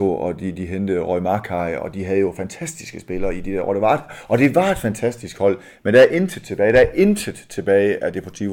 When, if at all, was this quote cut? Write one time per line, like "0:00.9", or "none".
none